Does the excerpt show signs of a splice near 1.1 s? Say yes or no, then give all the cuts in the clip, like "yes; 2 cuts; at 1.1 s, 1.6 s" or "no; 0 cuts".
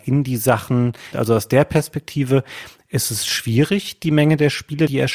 yes; 1 cut; at 1.1 s